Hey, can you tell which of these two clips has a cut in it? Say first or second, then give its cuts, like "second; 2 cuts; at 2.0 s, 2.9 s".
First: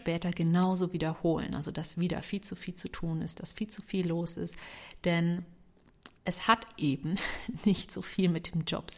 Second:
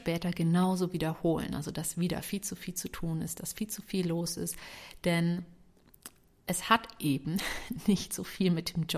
first; 1 cut; at 6.2 s